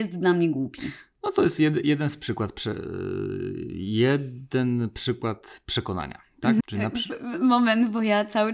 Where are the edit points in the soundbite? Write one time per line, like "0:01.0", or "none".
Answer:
0:06.6